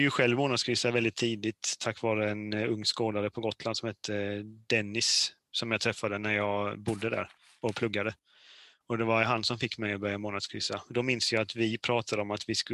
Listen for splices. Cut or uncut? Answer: uncut